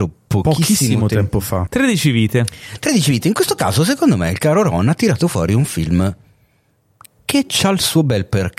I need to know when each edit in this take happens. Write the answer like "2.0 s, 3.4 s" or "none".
1.7 s